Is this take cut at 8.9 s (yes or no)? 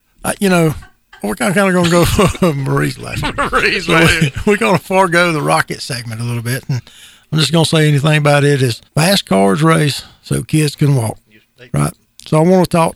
yes